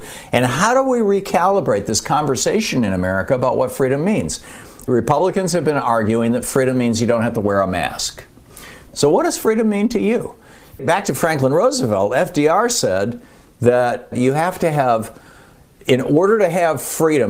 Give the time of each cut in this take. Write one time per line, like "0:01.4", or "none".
0:08.9